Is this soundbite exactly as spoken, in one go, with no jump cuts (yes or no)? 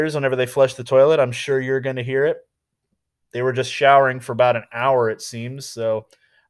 yes